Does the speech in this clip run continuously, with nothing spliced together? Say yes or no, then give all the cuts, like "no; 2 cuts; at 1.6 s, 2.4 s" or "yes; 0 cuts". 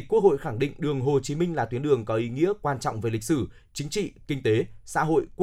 yes; 0 cuts